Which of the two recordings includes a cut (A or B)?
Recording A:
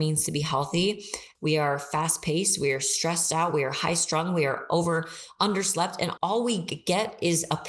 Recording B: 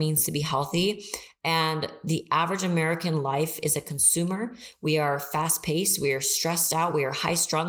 A